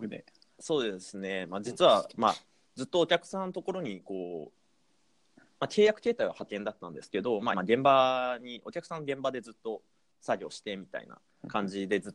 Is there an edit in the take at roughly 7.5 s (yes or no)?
yes